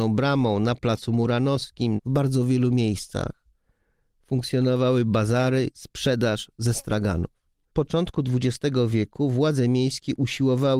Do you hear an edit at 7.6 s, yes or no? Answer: yes